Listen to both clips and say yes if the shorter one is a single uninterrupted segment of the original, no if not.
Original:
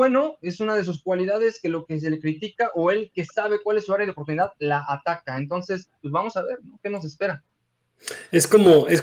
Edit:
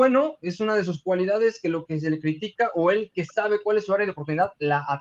yes